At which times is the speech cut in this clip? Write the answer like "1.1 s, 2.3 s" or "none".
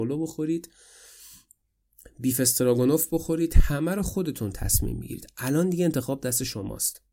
none